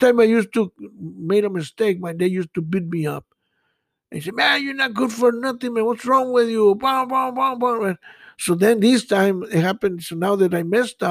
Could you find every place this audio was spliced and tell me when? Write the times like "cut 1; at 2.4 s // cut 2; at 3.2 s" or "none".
none